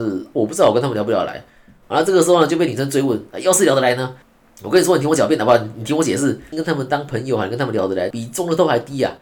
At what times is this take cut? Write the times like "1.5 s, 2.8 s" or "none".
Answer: 6.5 s, 8.1 s